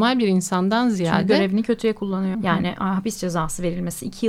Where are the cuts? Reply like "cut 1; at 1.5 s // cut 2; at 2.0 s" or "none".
cut 1; at 2.3 s